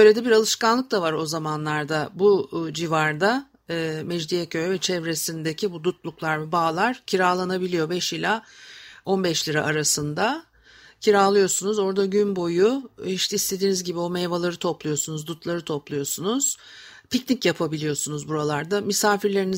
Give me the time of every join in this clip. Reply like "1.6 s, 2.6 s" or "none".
none